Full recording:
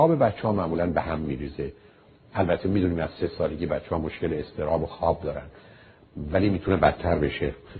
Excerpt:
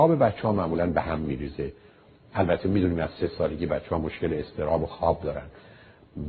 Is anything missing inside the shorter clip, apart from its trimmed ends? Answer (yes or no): no